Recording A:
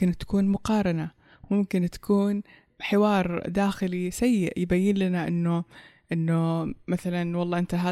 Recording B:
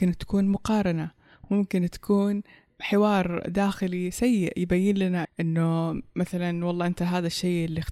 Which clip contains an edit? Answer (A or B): B